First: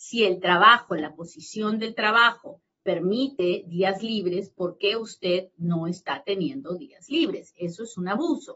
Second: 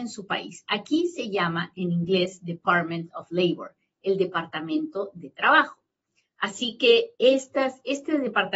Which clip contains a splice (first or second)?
second